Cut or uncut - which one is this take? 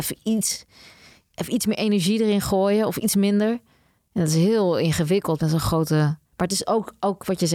cut